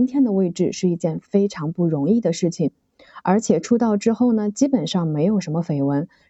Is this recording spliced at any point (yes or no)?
no